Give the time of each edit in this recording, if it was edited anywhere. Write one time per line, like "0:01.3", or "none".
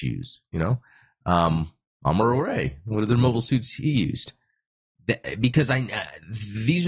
none